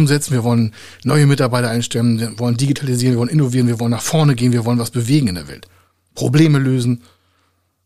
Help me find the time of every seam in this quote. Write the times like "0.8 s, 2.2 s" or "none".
none